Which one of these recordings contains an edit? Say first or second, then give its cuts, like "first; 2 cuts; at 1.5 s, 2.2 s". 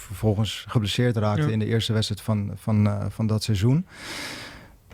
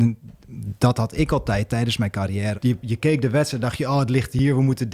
second; 1 cut; at 2.5 s